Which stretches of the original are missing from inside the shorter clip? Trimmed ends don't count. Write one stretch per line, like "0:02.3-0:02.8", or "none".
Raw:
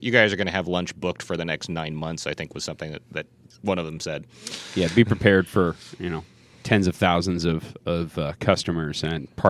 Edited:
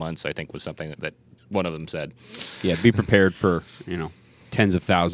0:02.9-0:03.0